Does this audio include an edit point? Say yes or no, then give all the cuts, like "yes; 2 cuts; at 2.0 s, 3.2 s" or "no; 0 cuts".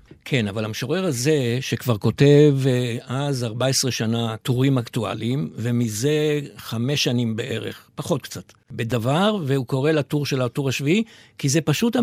no; 0 cuts